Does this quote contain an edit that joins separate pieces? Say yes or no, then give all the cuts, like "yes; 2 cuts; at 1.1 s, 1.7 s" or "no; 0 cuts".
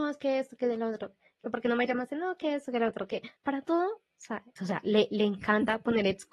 yes; 2 cuts; at 3.4 s, 4.6 s